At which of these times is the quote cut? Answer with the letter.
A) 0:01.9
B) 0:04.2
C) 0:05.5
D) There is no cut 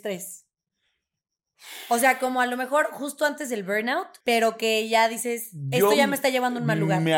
B